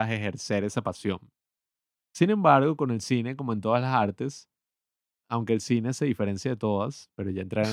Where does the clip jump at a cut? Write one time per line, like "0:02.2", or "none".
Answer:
0:05.2